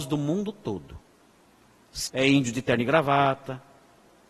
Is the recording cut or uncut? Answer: cut